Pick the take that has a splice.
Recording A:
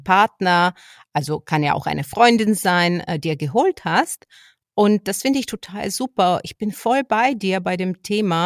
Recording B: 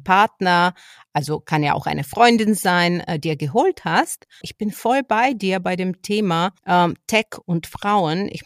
B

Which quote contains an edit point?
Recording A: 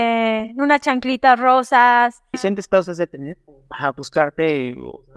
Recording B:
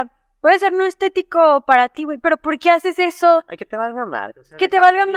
A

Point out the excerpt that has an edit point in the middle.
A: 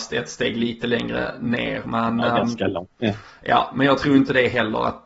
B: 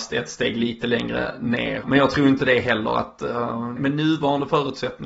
B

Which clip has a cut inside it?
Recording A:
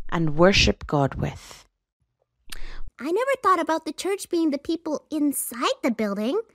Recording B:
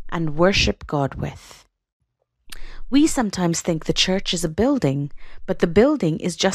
A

